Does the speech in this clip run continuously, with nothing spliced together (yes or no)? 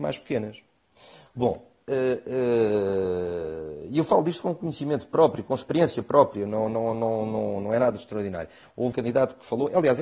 no